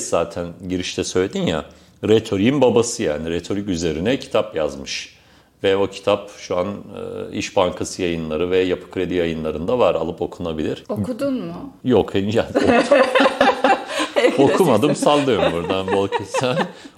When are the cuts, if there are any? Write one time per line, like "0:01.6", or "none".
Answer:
none